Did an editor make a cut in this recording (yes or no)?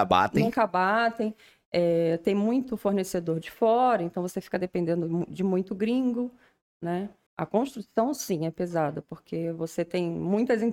yes